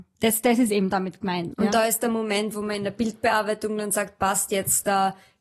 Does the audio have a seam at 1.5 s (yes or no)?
yes